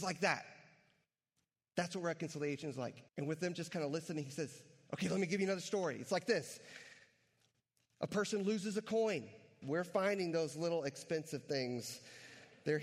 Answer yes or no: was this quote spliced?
yes